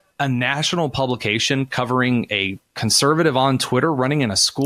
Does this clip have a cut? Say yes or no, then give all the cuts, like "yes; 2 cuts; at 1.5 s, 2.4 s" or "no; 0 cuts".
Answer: yes; 1 cut; at 2.7 s